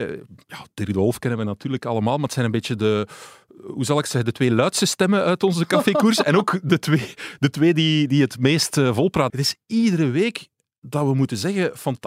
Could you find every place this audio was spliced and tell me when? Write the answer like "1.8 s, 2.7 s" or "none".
9.3 s